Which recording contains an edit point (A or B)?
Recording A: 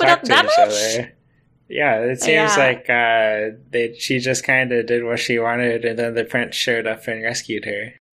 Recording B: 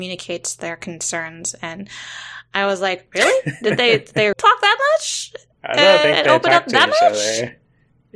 B